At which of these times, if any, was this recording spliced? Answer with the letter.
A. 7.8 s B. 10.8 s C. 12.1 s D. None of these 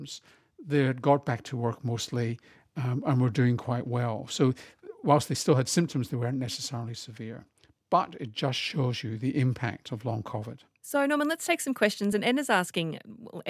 D